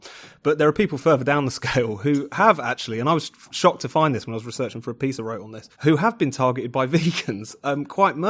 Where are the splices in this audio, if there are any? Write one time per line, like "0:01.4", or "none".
0:05.7

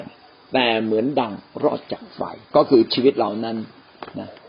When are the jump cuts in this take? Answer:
0:02.4

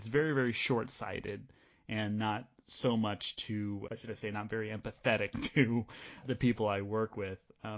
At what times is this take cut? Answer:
0:03.9
0:06.2

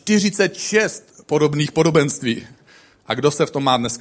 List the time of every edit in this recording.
none

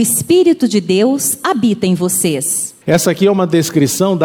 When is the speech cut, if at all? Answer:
0:02.8

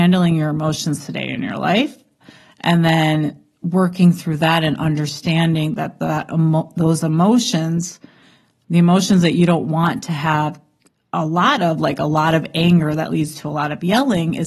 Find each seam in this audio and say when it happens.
none

